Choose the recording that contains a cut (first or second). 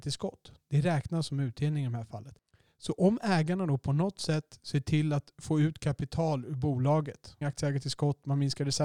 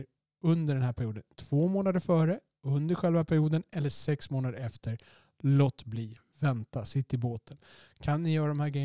first